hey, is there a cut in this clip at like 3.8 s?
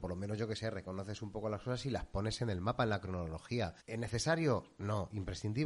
yes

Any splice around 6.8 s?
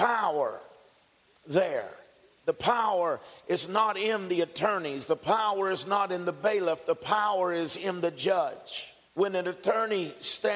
no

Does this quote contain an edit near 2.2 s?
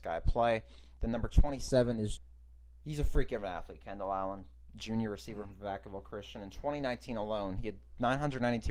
yes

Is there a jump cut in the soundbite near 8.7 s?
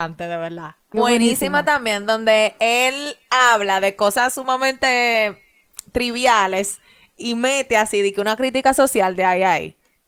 no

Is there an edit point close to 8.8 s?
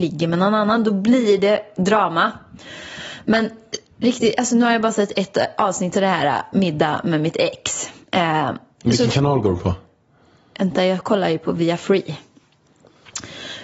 yes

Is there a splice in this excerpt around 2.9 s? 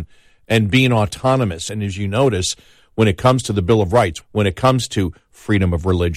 no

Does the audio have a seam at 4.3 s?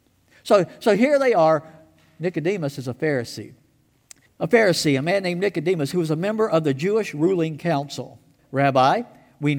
yes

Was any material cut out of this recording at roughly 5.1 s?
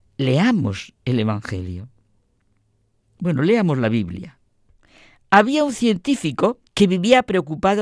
no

